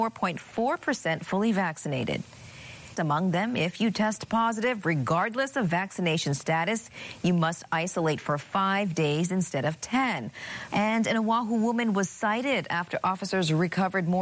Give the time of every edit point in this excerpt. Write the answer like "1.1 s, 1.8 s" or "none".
2.9 s, 10.7 s